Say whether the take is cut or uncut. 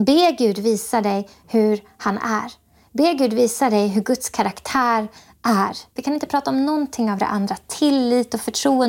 cut